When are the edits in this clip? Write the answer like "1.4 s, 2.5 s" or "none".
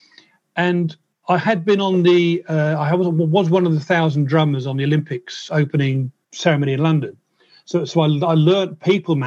none